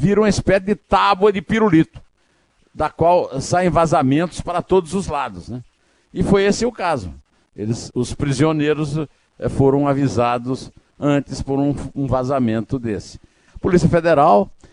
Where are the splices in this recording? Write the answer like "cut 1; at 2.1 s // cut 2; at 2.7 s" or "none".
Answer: cut 1; at 7.9 s // cut 2; at 13.5 s